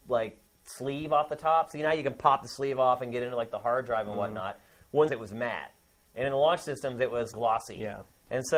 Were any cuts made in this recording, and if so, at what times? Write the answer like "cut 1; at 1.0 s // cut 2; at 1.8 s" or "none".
cut 1; at 5.1 s // cut 2; at 7.3 s